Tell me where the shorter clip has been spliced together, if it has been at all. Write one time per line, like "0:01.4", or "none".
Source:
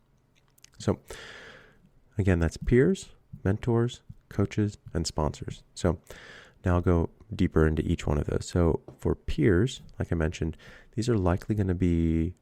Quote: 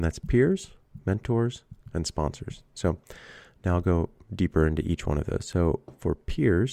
0:01.8